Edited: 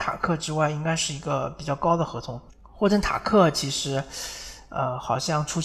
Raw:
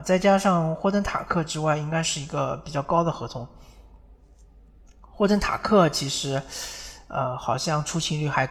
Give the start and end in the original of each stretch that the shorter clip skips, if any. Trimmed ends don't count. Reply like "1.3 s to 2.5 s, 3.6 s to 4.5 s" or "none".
3.6 s to 4.9 s